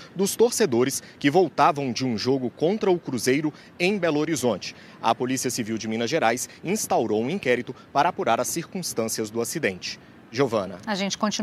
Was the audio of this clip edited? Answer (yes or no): no